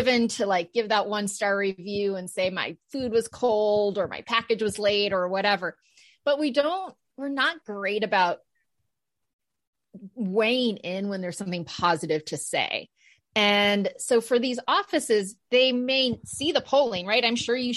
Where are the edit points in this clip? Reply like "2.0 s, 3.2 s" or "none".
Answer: none